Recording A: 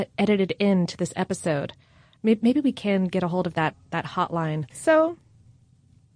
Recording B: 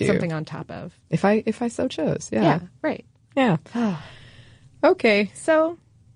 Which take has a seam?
A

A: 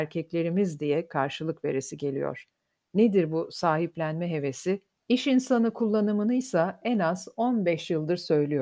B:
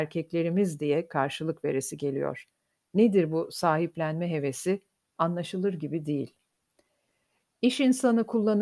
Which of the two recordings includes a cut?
A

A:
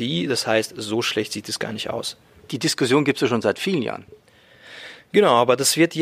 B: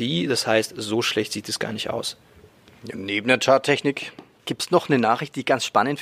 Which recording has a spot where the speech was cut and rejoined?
A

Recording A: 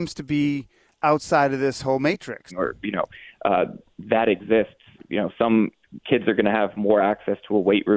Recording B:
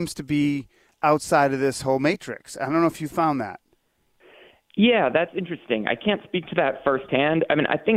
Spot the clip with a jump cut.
A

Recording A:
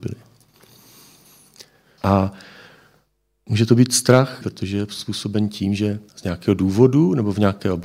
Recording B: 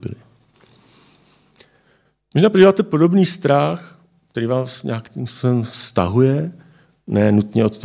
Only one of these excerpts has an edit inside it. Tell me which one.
A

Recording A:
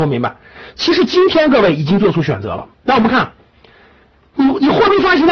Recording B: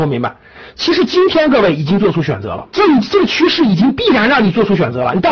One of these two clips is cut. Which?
B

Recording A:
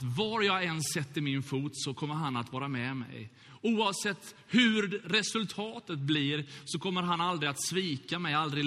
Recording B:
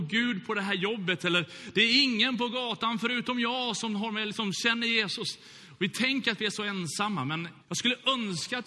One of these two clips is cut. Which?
B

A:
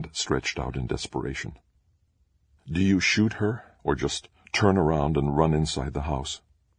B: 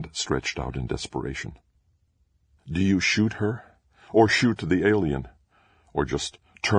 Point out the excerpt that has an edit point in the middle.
A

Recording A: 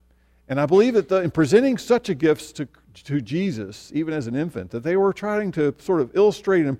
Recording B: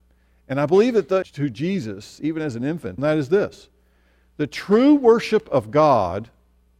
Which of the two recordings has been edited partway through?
B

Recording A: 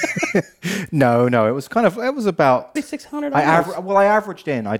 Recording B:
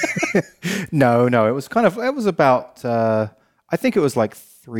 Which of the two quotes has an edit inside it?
A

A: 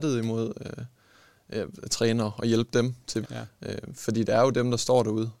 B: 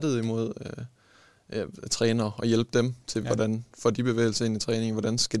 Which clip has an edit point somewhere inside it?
A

